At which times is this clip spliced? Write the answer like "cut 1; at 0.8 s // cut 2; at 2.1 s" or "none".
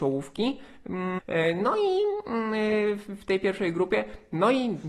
cut 1; at 1.2 s